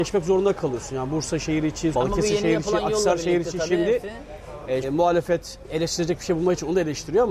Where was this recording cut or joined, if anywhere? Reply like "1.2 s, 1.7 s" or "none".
1.9 s, 4.8 s